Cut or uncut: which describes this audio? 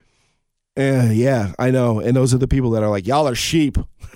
uncut